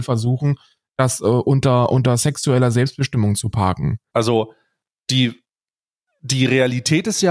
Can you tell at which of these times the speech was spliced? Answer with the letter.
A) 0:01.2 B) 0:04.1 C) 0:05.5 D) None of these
B